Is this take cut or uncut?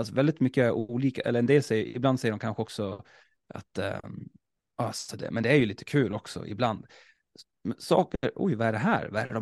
cut